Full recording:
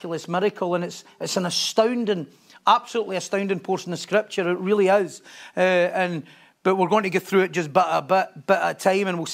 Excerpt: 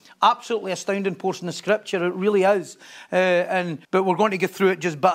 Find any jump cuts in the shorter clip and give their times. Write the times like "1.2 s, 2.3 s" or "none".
3.8 s